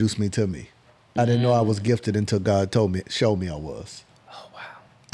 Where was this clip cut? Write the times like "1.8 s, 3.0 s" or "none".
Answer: none